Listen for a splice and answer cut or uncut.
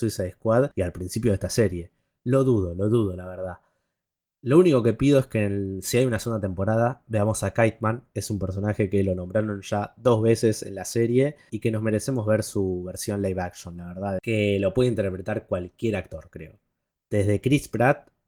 cut